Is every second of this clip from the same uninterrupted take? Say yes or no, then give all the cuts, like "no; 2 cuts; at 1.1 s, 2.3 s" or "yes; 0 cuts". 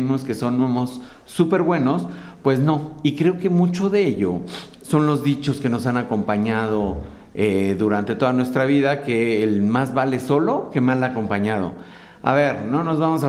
yes; 0 cuts